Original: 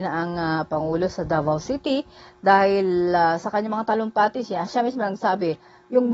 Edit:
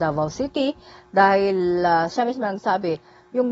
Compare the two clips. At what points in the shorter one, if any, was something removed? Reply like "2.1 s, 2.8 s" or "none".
2.1 s

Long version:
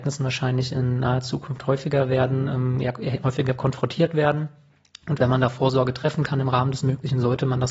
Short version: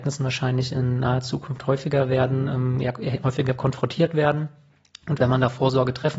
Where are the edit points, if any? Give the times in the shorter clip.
none

